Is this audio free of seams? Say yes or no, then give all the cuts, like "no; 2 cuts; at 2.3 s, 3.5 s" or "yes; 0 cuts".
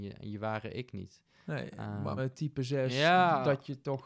no; 1 cut; at 2.2 s